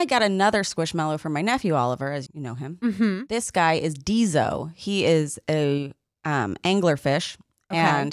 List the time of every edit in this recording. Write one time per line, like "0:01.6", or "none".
0:02.3